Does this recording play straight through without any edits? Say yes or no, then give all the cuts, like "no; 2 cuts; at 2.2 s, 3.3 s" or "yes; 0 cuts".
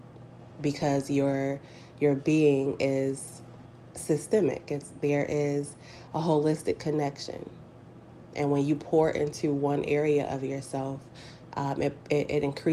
yes; 0 cuts